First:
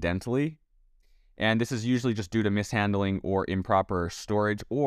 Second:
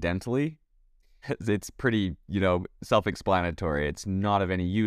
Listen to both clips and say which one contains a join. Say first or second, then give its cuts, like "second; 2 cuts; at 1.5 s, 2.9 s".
second; 1 cut; at 1.2 s